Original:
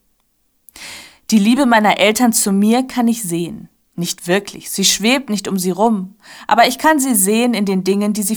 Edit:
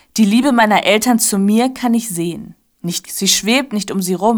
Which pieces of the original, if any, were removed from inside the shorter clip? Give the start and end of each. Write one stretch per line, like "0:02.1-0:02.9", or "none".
0:04.2-0:04.6